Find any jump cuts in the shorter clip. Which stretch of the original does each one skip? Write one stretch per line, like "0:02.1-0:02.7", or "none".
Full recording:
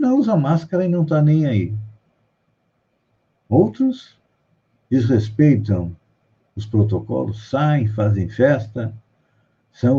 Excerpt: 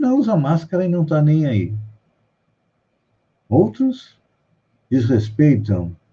none